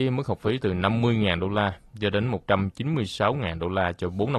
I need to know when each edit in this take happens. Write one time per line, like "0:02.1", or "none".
none